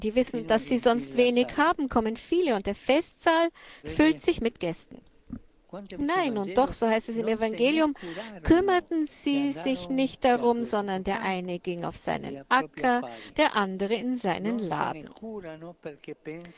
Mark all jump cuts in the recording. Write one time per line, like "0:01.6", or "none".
0:03.8
0:06.0